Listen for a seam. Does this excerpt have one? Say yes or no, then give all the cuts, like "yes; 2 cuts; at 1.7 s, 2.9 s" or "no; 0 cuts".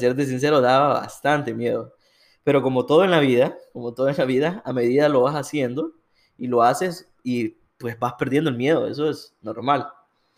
no; 0 cuts